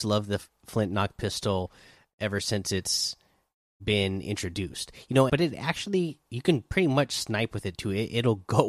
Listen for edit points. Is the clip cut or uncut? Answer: cut